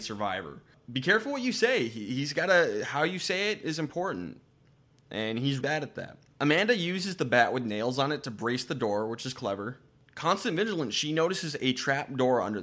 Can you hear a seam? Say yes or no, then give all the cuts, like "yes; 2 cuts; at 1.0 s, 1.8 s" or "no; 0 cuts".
yes; 1 cut; at 5.6 s